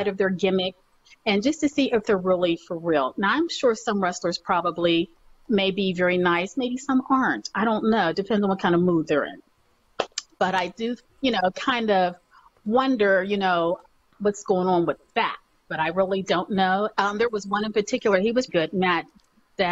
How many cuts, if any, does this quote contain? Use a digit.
2